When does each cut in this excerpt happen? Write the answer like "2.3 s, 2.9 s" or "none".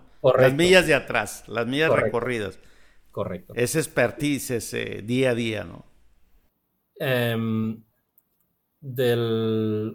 none